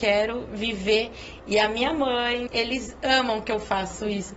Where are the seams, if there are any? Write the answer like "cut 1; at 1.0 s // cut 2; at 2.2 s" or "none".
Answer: cut 1; at 2.5 s